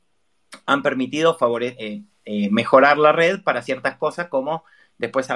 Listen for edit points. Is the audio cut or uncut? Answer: uncut